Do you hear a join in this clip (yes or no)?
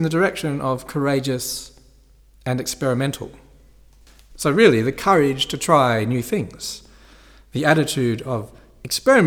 no